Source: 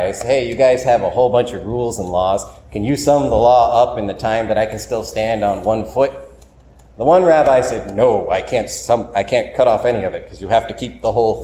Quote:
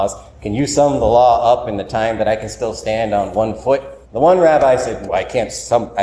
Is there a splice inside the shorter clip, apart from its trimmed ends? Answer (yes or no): yes